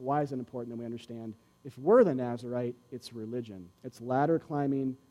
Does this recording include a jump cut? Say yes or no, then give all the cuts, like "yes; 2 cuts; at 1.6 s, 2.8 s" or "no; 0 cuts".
yes; 2 cuts; at 1.6 s, 3.7 s